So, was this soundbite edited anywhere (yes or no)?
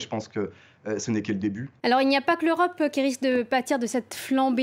yes